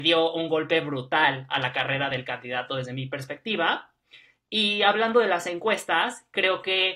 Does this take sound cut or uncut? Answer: uncut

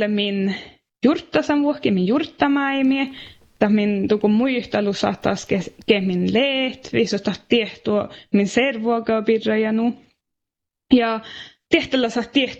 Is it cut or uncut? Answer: uncut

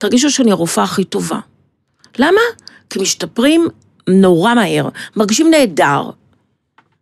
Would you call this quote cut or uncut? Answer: uncut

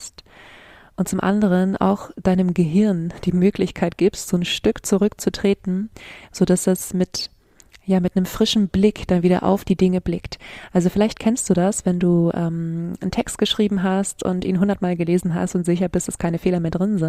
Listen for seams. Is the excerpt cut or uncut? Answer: uncut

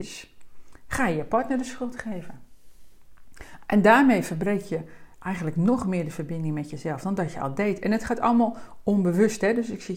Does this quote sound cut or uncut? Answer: uncut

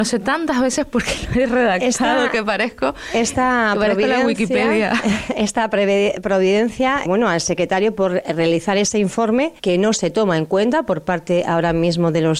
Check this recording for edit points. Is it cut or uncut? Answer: cut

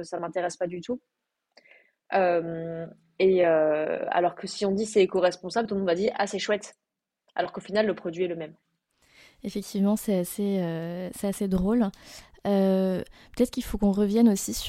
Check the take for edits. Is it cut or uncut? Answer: uncut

